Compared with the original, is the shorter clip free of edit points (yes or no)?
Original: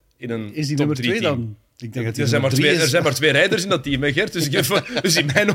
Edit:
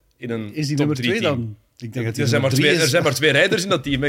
yes